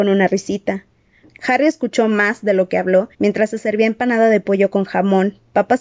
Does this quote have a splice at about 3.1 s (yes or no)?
yes